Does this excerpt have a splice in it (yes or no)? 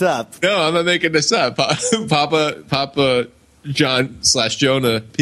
no